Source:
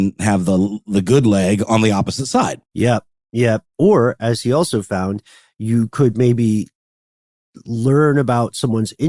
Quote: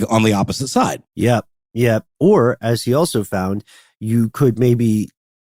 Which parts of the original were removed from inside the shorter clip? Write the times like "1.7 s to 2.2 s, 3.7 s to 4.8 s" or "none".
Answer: none